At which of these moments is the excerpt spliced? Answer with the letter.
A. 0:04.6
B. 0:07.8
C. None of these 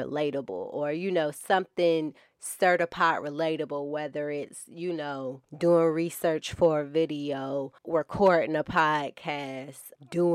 B